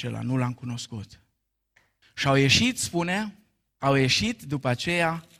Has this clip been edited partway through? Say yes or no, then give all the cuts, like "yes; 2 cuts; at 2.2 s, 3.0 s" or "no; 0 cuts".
yes; 1 cut; at 2.0 s